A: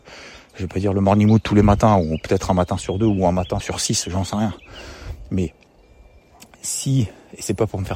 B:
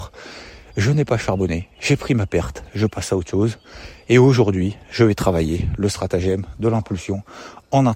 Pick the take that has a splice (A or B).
A